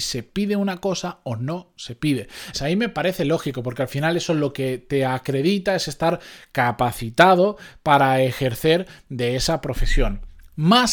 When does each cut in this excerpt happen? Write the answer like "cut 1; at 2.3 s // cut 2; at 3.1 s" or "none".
cut 1; at 2.5 s